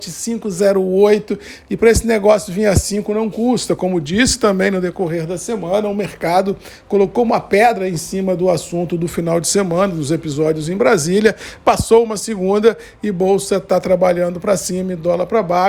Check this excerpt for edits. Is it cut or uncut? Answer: uncut